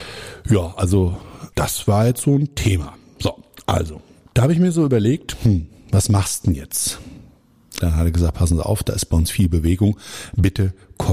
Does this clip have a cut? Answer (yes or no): yes